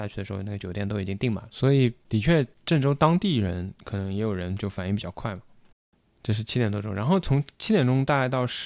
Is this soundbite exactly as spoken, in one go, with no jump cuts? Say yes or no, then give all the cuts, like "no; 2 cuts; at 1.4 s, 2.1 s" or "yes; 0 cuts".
yes; 0 cuts